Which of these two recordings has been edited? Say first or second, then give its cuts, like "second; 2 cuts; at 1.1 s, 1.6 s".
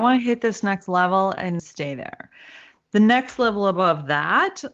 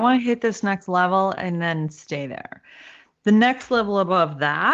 first; 1 cut; at 1.6 s